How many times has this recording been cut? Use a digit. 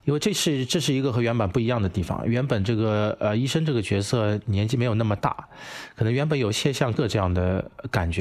1